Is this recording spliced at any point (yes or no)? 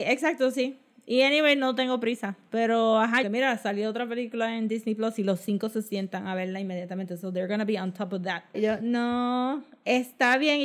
yes